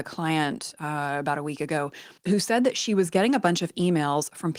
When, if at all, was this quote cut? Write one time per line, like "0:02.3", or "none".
0:02.2

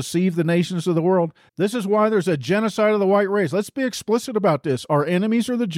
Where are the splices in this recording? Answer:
0:01.5

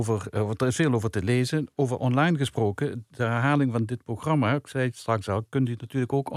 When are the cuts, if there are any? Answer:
none

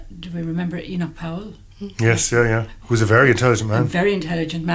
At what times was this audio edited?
0:02.8

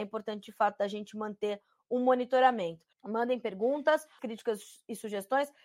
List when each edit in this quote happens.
0:02.9
0:04.2

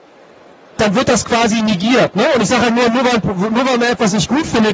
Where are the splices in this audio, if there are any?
none

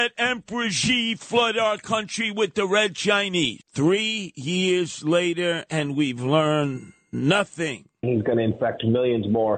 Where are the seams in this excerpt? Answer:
0:03.6
0:08.0

